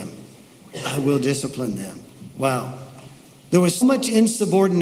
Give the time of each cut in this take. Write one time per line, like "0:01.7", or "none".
0:03.8